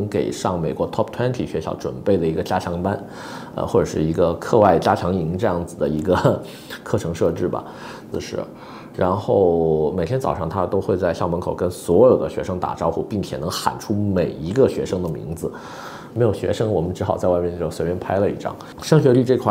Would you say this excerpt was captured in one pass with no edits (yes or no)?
no